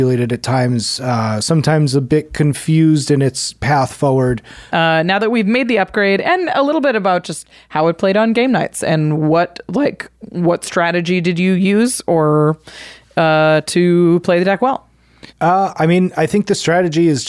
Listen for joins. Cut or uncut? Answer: cut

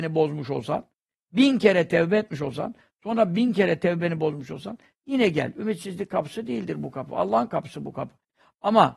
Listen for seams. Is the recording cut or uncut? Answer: uncut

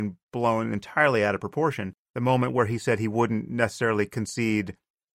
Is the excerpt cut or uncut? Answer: uncut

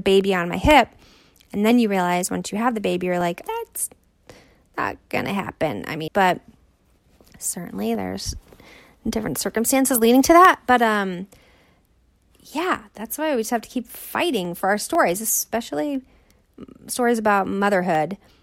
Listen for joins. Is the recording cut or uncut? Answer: cut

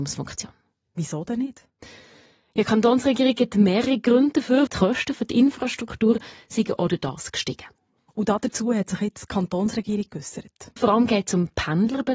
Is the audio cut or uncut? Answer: cut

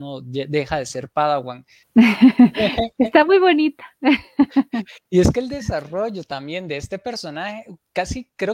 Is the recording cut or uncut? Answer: cut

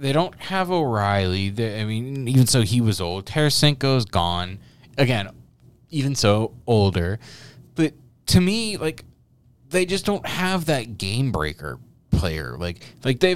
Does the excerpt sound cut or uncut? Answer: uncut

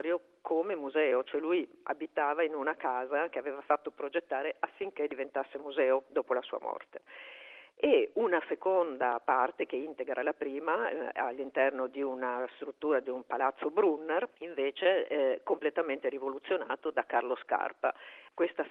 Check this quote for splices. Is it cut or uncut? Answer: uncut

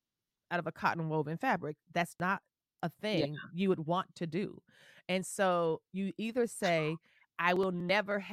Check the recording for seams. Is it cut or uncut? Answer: cut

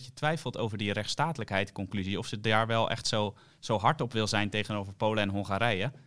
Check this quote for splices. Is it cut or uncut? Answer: uncut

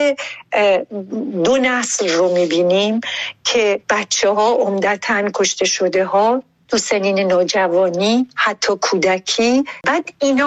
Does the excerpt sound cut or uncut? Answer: cut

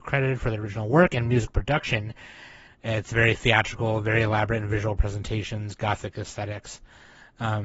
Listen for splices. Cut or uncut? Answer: cut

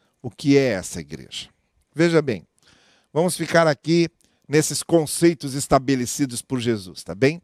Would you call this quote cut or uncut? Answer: uncut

